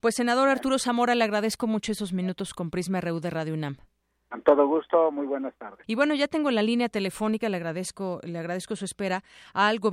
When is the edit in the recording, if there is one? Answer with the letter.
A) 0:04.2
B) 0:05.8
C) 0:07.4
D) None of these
B